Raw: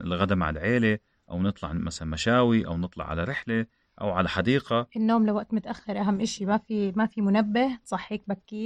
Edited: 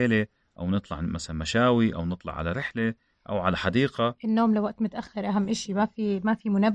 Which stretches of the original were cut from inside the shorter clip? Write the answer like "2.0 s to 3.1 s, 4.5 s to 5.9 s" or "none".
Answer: none

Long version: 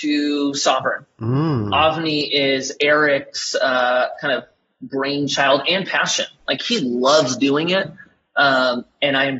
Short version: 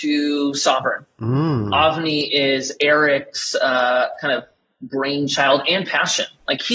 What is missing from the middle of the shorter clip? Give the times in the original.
none

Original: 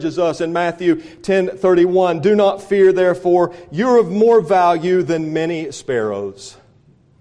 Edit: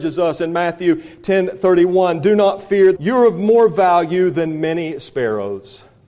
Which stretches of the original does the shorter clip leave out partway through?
2.9 s to 3.7 s

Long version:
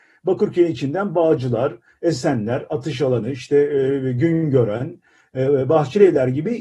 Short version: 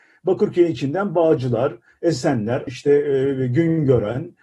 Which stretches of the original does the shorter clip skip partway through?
2.7 s to 3.3 s

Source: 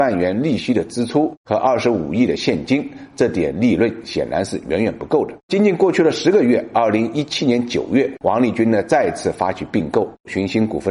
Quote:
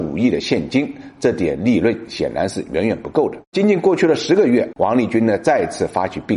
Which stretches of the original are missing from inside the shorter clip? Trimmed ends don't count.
6.7 s to 8.2 s

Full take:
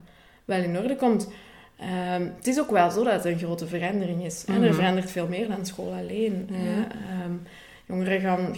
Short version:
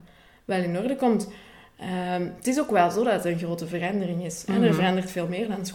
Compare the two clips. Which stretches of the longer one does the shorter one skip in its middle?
none

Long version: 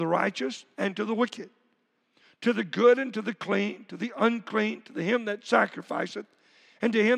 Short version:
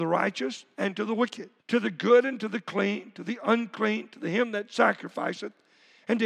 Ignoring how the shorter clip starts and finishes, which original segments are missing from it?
1.6 s to 2.3 s

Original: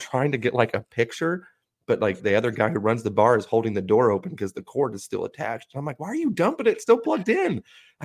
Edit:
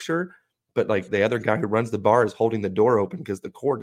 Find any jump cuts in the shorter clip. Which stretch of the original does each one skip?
none

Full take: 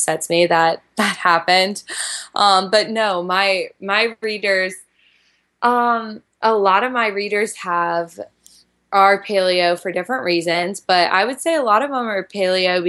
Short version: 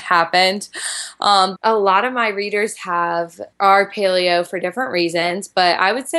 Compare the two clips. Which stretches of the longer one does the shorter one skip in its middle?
2.7 s to 6.3 s, 8.3 s to 8.8 s

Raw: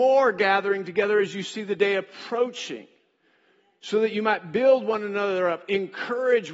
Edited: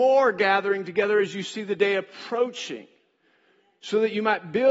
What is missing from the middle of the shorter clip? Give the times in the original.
none

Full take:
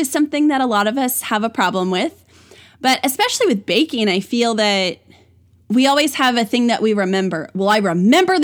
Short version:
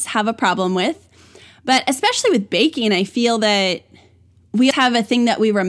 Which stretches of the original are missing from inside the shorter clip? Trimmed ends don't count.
5.9 s to 6.1 s

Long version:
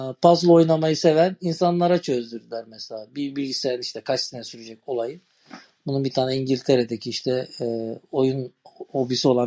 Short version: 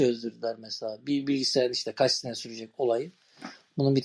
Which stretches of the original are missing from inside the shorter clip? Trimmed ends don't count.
none

